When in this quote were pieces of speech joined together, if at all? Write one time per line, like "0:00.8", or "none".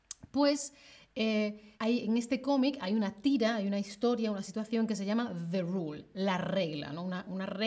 0:01.7